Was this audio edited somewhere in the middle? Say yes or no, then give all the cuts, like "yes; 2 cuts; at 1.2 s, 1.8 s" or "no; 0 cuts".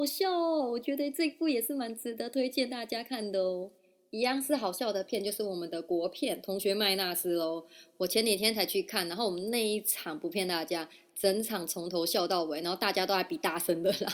no; 0 cuts